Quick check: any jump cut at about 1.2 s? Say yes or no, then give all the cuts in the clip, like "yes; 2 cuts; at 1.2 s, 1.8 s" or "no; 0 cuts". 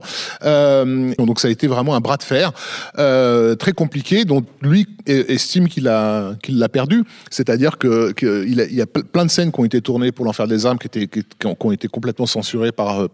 yes; 1 cut; at 1.2 s